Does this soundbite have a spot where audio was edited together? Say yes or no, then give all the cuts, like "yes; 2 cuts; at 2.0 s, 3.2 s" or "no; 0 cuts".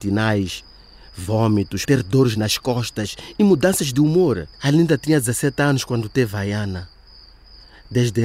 yes; 2 cuts; at 1.9 s, 4.5 s